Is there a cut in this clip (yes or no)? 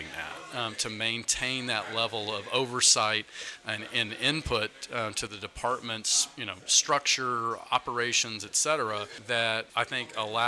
no